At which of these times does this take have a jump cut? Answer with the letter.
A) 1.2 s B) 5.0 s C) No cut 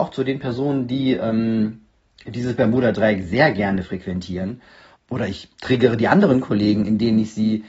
B